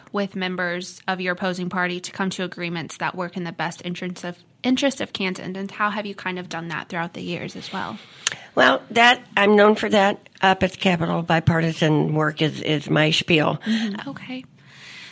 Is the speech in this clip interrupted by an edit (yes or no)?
yes